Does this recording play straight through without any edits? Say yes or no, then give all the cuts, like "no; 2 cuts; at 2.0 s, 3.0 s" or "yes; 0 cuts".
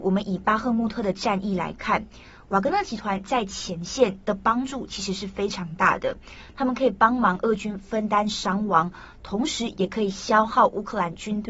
yes; 0 cuts